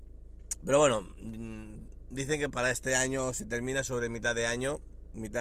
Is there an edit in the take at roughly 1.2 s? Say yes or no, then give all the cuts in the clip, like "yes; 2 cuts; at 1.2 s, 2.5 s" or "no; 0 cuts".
no; 1 cut; at 2.5 s